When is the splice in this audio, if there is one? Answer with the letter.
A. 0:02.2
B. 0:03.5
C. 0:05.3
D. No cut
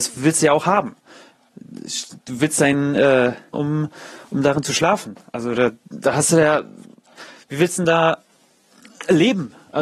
B